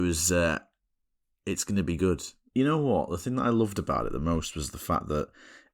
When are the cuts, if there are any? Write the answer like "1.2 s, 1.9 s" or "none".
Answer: 2.5 s